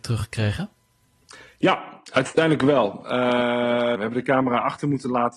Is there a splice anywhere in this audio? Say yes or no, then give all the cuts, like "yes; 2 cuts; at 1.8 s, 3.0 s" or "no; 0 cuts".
yes; 1 cut; at 4.0 s